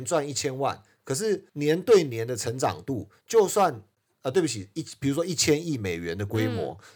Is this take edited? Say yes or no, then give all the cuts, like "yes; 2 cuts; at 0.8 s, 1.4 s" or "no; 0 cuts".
yes; 1 cut; at 1.5 s